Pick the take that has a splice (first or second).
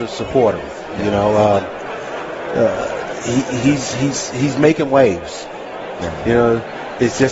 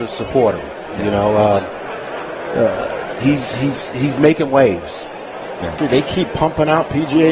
second